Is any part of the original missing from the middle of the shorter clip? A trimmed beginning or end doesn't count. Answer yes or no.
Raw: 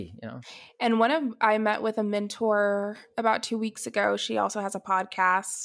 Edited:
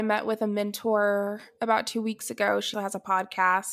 yes